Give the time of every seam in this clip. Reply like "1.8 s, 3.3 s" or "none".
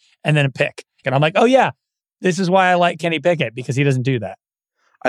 1.0 s